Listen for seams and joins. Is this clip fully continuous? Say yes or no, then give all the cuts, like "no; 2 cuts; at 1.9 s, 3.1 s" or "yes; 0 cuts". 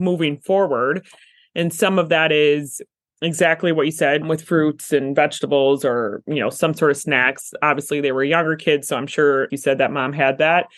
no; 2 cuts; at 4.2 s, 9.5 s